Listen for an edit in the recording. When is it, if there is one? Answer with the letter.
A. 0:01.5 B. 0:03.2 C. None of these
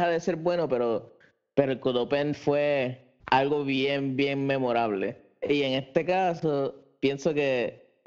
B